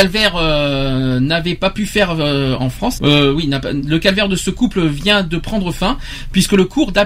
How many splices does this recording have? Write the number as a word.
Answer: one